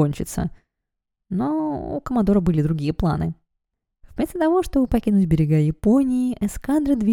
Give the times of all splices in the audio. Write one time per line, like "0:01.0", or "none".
none